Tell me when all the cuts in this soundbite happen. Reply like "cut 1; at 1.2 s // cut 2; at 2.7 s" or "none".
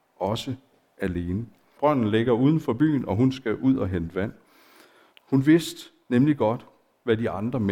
cut 1; at 1.8 s // cut 2; at 5.1 s